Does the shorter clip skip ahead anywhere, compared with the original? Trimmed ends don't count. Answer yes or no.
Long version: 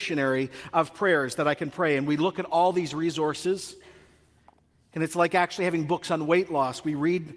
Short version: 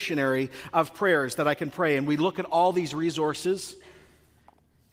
no